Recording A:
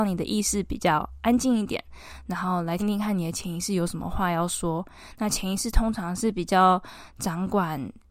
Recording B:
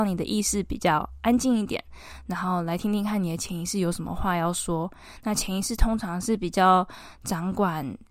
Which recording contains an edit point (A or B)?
A